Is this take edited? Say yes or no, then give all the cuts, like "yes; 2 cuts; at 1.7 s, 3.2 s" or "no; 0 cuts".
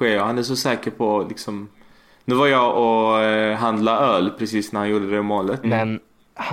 yes; 1 cut; at 5.6 s